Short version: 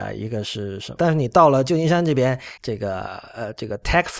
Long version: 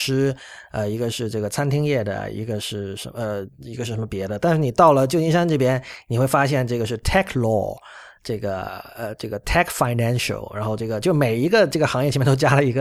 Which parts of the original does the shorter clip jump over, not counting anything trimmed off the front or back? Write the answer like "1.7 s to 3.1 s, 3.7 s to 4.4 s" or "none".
3.1 s to 4.4 s, 6.0 s to 8.2 s